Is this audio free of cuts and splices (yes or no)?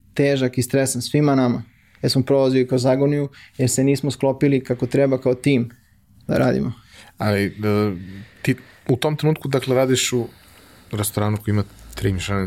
yes